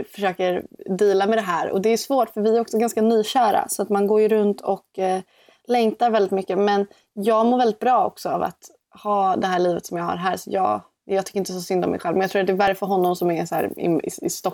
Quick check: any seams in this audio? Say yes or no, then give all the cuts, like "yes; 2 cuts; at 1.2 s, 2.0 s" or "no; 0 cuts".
no; 0 cuts